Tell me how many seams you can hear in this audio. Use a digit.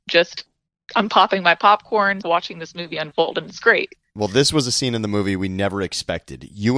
1